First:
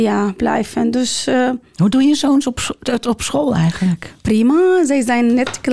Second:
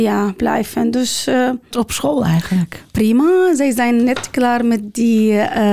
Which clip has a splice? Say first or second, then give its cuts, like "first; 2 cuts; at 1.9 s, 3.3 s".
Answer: second; 1 cut; at 1.7 s